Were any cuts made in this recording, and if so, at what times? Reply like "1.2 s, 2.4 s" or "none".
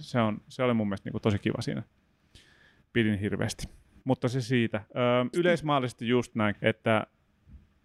5.3 s, 6.5 s